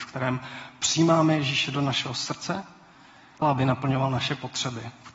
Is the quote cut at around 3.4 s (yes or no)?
yes